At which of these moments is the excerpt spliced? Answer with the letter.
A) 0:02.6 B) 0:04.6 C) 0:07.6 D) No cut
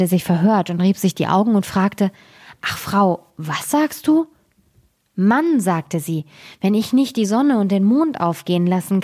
D